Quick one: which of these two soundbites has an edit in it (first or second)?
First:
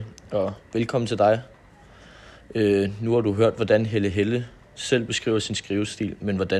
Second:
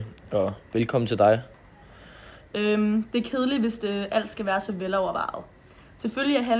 second